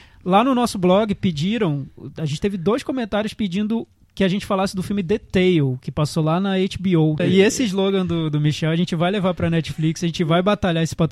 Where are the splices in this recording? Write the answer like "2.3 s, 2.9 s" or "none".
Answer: 7.2 s